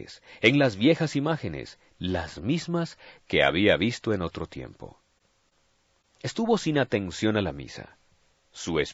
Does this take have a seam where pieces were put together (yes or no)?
no